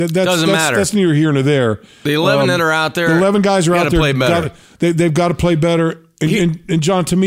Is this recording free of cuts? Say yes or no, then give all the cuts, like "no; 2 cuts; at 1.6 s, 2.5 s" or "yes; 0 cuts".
yes; 0 cuts